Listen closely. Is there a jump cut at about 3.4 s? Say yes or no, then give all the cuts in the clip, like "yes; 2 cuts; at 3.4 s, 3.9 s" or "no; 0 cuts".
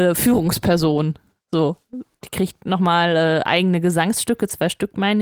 no; 1 cut; at 2.2 s